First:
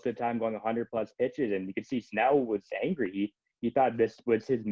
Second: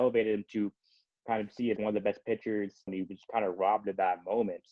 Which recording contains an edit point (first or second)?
second